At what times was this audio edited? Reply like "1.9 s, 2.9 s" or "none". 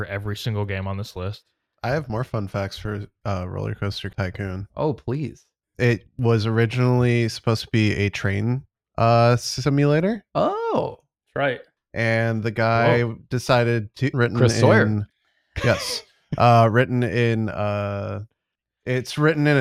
14.1 s